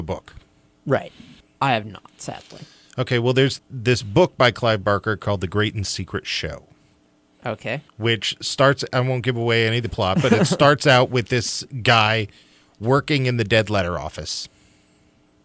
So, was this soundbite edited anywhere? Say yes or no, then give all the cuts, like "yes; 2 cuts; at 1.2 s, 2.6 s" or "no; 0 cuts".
yes; 3 cuts; at 1.4 s, 3.6 s, 7.9 s